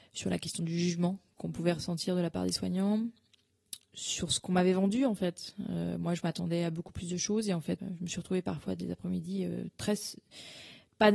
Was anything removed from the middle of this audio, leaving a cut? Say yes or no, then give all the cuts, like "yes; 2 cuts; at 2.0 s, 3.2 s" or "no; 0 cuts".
yes; 1 cut; at 7.8 s